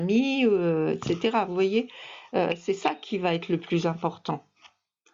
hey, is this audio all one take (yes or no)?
yes